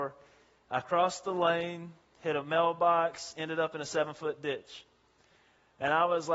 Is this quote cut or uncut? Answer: uncut